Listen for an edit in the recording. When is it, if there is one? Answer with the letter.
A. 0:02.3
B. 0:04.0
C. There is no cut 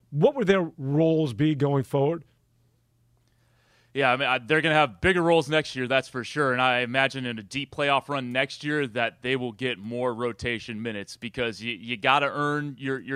C